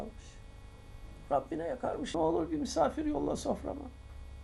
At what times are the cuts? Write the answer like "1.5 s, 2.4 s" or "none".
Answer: 2.1 s